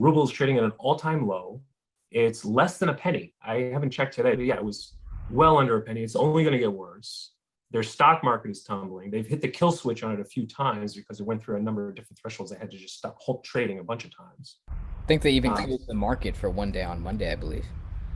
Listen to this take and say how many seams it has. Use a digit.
1